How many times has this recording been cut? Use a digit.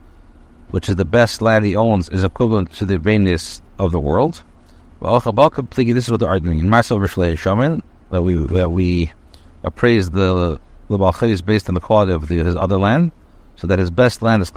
0